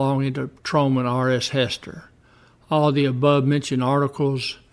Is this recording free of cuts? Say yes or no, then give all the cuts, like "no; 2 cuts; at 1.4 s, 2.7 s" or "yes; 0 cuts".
yes; 0 cuts